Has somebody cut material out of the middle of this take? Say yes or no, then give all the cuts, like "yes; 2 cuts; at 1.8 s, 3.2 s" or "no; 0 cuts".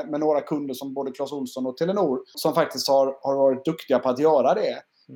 yes; 1 cut; at 2.3 s